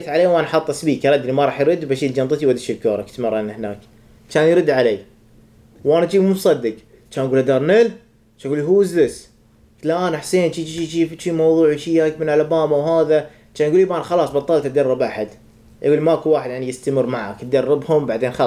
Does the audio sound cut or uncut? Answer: uncut